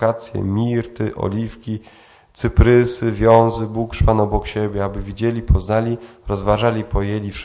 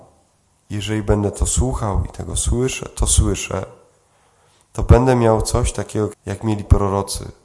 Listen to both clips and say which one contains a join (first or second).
second